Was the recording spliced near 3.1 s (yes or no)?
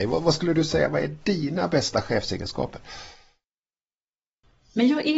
no